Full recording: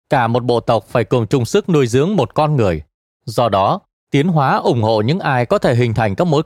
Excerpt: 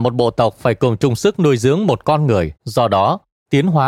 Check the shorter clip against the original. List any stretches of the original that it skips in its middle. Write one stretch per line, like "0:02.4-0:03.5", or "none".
0:02.9-0:03.2